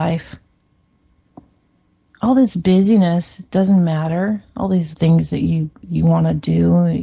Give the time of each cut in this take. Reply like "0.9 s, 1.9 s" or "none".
4.9 s